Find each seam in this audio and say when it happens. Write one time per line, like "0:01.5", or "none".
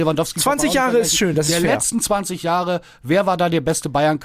none